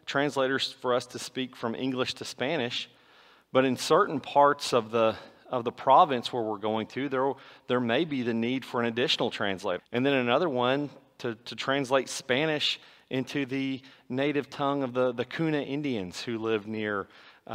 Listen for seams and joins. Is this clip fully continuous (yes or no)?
no